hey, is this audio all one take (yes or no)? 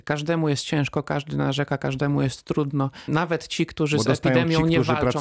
no